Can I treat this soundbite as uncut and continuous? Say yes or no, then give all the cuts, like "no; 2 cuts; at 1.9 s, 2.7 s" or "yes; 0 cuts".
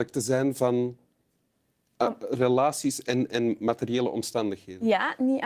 yes; 0 cuts